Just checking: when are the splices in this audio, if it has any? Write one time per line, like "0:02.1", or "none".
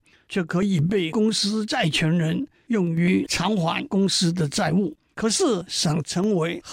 0:05.1

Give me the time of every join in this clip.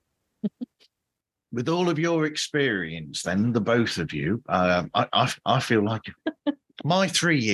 0:06.2

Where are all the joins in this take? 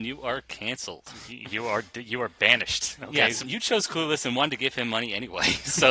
0:03.4

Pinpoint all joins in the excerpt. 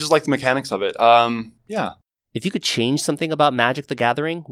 0:02.2

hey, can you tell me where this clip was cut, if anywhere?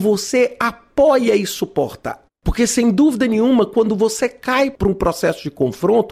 0:02.3

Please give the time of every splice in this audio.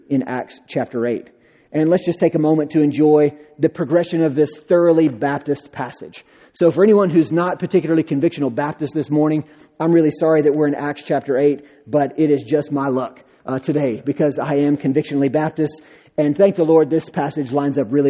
none

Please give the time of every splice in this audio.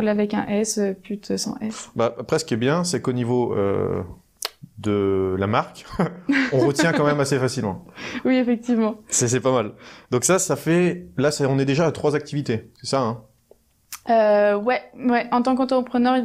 none

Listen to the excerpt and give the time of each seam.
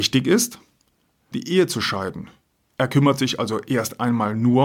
0:01.3

